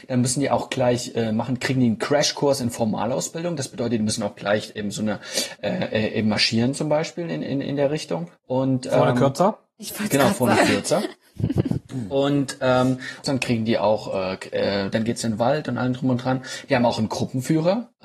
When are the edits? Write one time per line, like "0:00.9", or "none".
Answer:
0:13.2
0:14.9